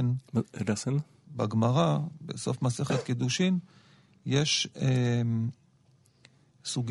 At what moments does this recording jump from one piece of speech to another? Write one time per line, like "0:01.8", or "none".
0:01.2